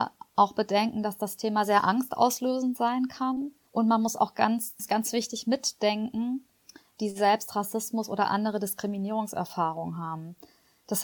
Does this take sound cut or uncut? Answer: cut